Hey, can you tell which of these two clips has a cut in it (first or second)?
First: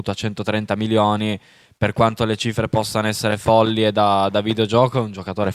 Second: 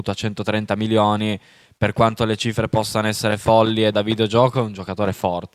second